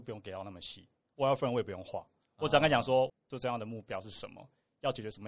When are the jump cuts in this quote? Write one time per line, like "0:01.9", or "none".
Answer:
0:03.1